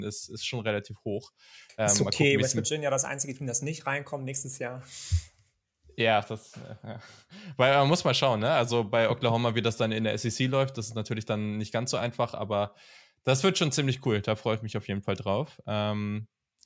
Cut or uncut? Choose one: uncut